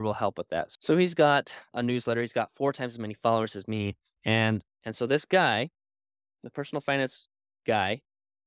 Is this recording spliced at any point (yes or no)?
yes